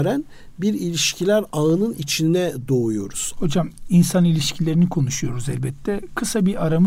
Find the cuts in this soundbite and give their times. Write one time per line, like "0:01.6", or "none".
0:03.4